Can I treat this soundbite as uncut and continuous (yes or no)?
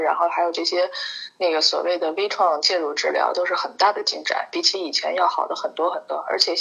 yes